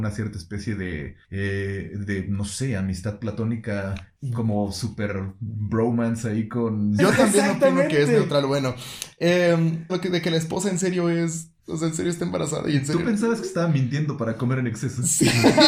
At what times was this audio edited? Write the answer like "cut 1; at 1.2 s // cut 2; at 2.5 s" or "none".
cut 1; at 7.0 s // cut 2; at 9.9 s